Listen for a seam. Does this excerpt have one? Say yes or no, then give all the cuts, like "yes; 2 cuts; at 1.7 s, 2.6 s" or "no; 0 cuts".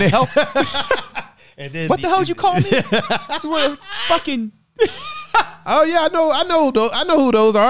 no; 0 cuts